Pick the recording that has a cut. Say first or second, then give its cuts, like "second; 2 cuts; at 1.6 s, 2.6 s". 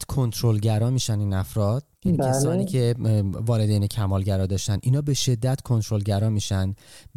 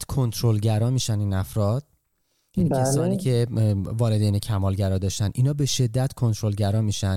first; 1 cut; at 2.0 s